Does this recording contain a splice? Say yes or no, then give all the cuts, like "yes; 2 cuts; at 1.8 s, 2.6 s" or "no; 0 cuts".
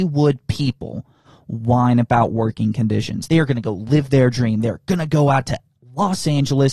yes; 1 cut; at 3.3 s